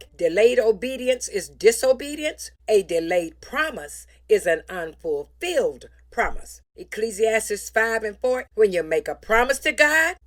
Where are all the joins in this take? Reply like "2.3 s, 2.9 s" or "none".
8.5 s